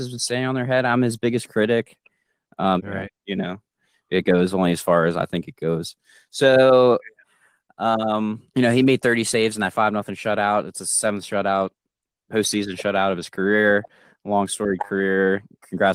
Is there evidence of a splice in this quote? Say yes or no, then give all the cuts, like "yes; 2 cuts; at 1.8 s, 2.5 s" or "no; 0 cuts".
yes; 2 cuts; at 2.8 s, 8.5 s